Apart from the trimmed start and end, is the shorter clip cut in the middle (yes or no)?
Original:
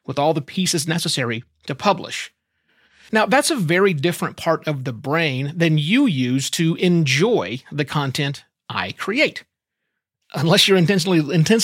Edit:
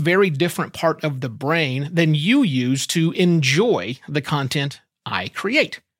no